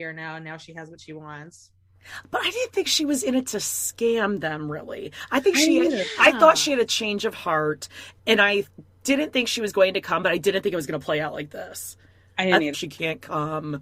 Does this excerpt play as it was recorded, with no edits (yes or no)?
no